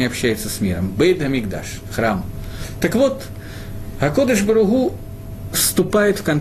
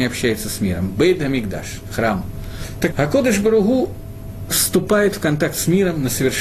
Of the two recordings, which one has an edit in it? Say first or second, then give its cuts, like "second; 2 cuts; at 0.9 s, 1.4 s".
second; 1 cut; at 2.9 s